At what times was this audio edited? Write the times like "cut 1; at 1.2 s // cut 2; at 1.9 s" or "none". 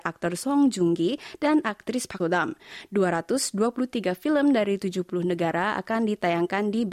cut 1; at 2.2 s